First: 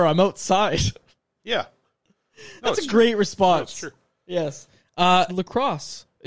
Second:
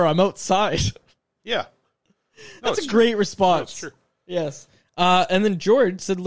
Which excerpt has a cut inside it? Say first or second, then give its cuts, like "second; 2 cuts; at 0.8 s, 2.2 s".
first; 1 cut; at 5.3 s